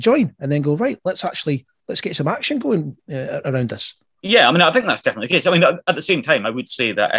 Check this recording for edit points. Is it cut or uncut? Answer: uncut